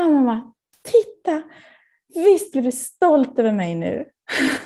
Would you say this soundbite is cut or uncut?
cut